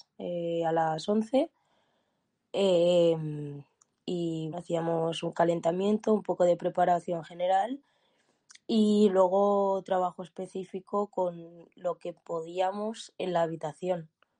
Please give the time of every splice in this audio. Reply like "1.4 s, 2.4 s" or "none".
4.5 s